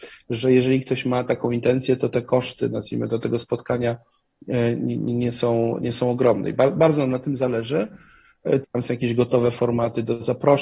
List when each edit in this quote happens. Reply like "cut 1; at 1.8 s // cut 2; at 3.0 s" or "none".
cut 1; at 8.6 s